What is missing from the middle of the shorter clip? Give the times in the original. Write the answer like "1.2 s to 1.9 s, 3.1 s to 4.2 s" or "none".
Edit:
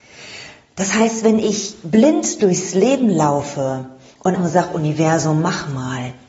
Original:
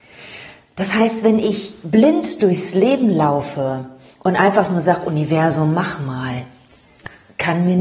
4.4 s to 4.7 s